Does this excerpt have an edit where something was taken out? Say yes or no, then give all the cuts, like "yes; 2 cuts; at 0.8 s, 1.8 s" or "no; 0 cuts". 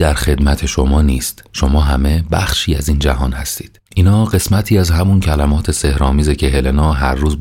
yes; 1 cut; at 3.9 s